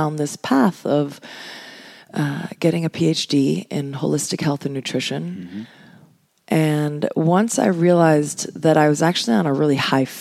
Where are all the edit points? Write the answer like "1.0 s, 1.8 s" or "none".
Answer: none

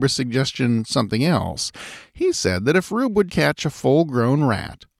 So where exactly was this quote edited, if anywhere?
3.3 s

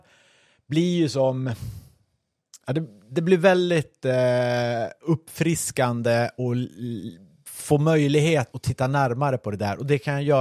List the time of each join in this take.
6.4 s, 8.5 s

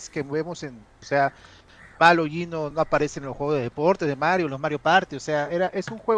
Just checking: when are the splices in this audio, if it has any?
1.0 s, 2.7 s

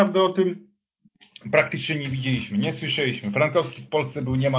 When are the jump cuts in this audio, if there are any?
none

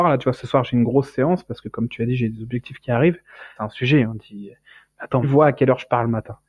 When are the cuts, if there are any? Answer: 3.6 s, 5.2 s

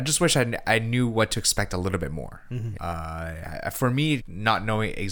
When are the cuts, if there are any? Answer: 2.8 s, 4.2 s

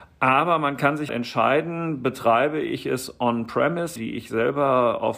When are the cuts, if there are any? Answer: 1.1 s, 4.0 s

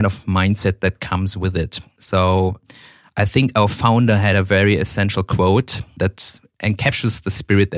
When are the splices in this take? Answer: none

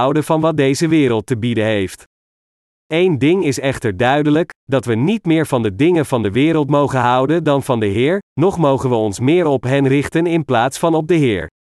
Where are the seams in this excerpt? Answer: 2.7 s

